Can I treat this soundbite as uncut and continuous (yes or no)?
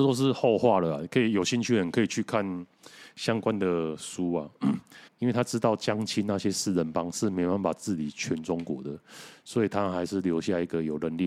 no